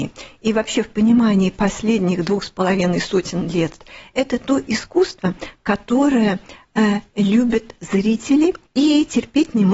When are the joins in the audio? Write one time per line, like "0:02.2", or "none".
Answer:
0:08.7